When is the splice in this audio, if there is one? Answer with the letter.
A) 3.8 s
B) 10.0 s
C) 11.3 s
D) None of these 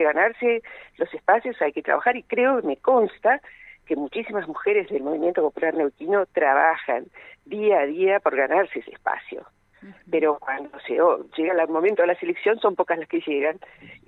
D